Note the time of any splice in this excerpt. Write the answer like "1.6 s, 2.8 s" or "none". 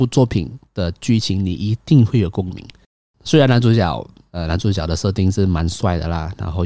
none